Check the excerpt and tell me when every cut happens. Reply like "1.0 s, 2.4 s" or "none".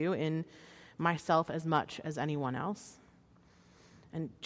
none